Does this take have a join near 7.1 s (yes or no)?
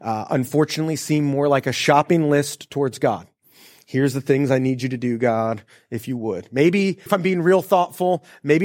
yes